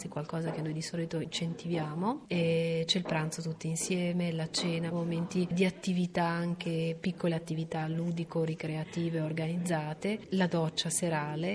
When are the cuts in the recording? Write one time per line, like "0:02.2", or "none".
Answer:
0:04.9